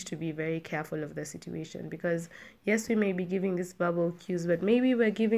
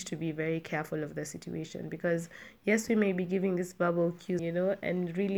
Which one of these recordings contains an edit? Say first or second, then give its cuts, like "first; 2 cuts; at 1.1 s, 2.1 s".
second; 1 cut; at 4.4 s